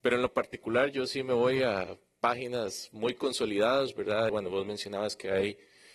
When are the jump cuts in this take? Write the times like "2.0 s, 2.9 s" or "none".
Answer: 4.3 s